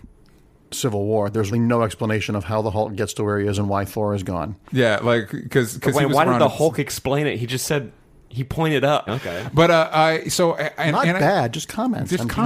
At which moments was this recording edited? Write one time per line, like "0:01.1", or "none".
0:01.5
0:09.1